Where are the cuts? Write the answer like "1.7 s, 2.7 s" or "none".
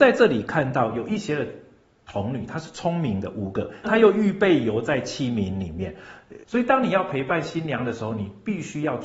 3.8 s, 6.4 s